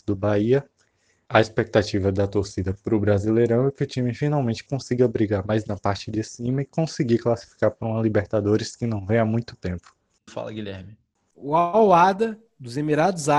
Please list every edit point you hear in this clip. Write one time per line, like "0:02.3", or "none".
0:01.3
0:10.3